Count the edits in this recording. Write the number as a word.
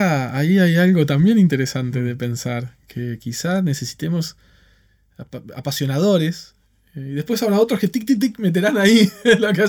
zero